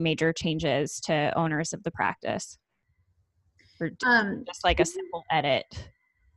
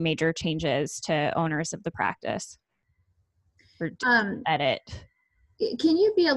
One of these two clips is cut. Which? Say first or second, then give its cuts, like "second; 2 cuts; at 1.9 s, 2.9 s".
second; 1 cut; at 4.4 s